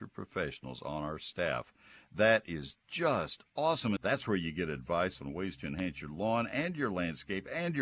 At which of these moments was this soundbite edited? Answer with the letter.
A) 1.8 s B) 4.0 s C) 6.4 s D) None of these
B